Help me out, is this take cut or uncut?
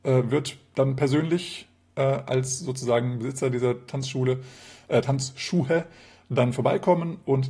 uncut